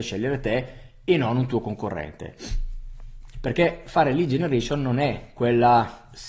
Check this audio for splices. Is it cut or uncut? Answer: cut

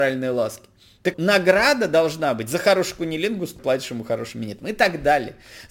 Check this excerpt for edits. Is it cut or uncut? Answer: cut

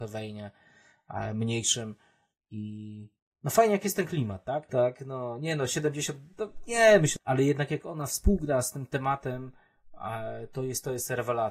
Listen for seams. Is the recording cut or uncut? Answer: cut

